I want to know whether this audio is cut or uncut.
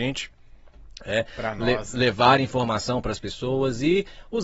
uncut